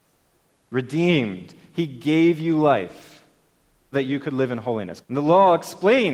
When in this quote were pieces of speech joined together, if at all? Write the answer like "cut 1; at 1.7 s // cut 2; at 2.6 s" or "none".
cut 1; at 3.9 s // cut 2; at 5.0 s